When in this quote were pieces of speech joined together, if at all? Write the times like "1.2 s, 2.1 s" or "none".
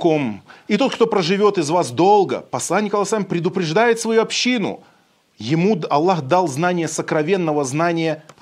none